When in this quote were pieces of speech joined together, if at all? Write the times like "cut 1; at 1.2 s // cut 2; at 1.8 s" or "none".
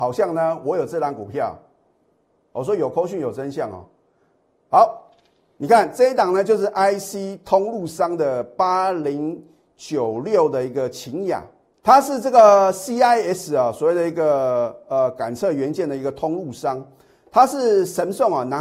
cut 1; at 11.7 s